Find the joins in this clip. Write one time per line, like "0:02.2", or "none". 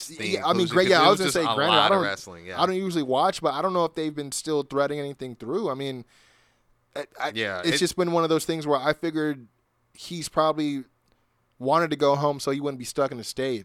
none